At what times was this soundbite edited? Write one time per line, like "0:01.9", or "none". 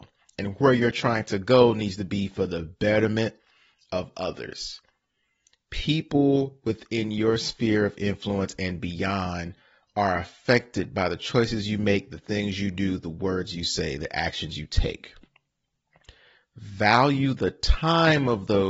0:16.4

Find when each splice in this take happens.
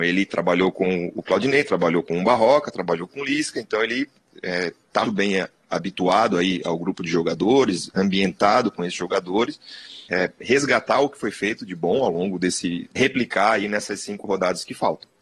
0:05.1
0:10.1
0:13.0

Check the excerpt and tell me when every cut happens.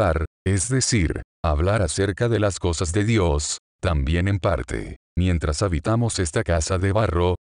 none

